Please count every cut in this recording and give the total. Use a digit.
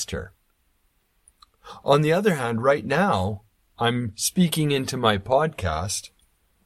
0